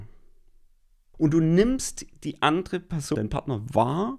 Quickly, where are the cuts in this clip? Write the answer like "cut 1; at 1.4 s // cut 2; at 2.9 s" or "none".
cut 1; at 1.1 s // cut 2; at 3.1 s